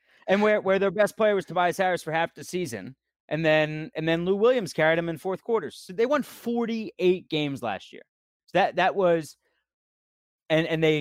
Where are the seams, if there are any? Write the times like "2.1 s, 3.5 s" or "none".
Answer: 8.4 s